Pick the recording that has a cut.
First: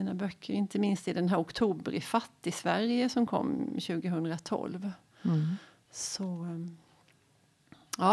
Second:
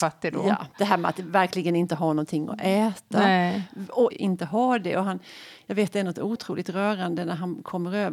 second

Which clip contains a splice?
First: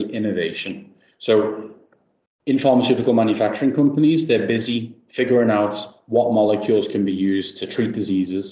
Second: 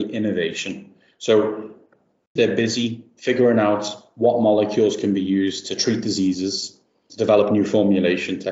second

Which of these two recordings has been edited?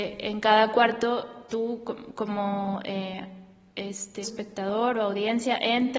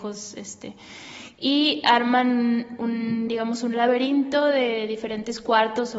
first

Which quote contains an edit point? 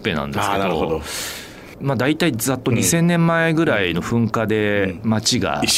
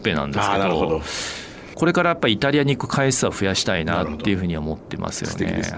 second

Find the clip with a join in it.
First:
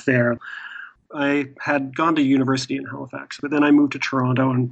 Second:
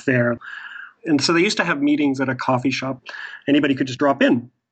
first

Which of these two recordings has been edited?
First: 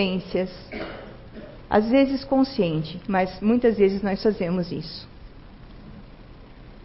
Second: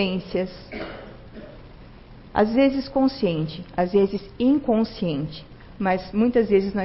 first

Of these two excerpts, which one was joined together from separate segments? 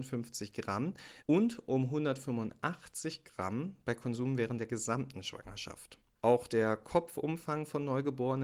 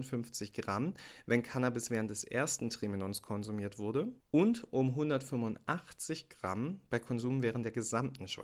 first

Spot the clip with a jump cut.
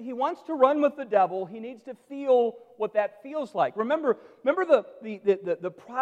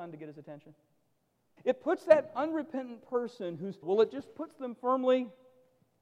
second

